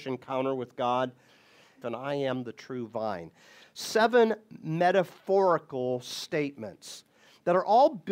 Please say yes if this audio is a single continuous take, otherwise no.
no